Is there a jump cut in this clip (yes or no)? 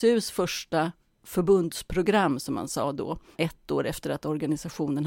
yes